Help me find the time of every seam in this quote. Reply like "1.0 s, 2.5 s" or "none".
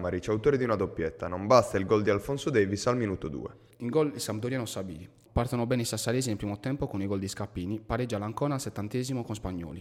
3.7 s, 5.3 s

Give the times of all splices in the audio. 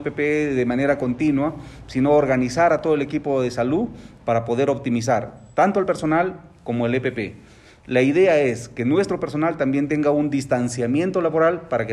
none

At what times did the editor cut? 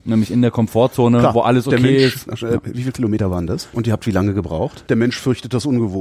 2.3 s, 3.7 s, 4.9 s

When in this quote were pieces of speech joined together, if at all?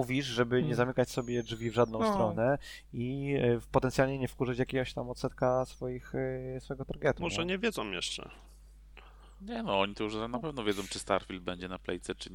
none

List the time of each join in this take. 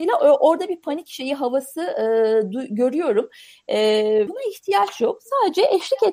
4.3 s

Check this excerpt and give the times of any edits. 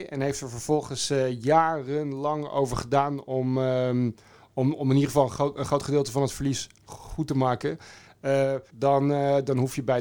8.7 s

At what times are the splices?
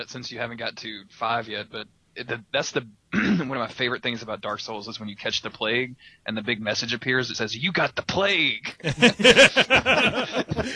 7.3 s

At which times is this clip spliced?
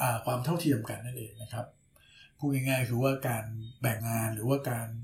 4.0 s

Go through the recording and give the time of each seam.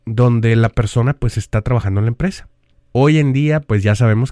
2.7 s

